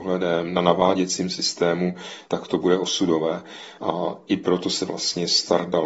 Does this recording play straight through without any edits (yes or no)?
no